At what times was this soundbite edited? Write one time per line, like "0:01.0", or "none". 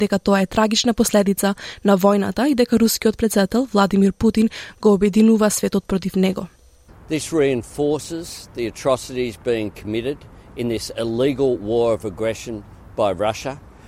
0:06.9